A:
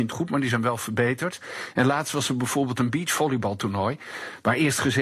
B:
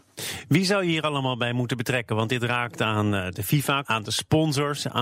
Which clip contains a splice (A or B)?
B